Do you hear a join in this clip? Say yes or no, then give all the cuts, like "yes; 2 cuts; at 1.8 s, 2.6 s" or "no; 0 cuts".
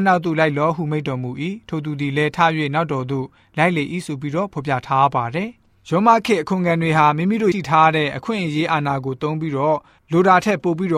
yes; 1 cut; at 7.5 s